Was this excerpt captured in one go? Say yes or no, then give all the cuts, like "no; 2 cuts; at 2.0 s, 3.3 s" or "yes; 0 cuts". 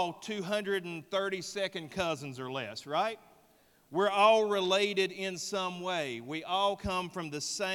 yes; 0 cuts